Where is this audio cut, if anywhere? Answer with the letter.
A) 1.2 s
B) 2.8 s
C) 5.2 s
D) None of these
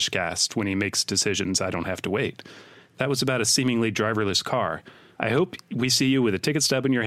C